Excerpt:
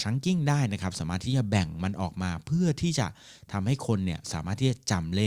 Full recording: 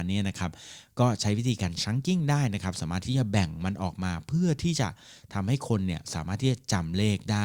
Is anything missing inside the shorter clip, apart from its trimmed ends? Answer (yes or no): no